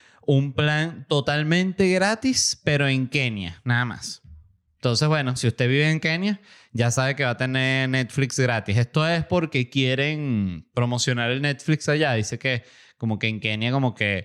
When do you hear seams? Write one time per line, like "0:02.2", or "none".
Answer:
none